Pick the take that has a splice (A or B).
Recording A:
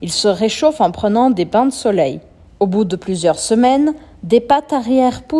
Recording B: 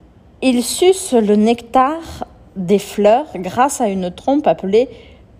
A